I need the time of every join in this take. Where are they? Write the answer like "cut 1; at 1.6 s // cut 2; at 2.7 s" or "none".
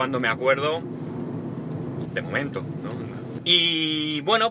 cut 1; at 2.1 s // cut 2; at 3.4 s